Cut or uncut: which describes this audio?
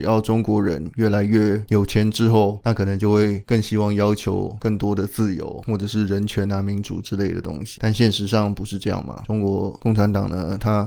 uncut